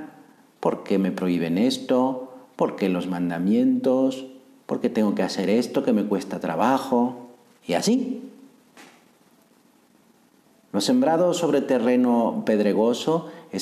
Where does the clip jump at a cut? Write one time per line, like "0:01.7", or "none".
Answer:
0:04.6